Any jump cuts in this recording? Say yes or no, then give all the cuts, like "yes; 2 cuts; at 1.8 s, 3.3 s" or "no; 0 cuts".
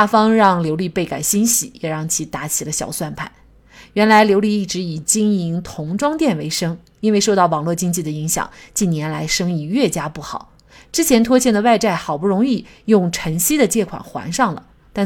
no; 0 cuts